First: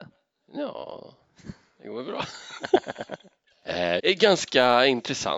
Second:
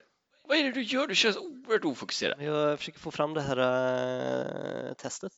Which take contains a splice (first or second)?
first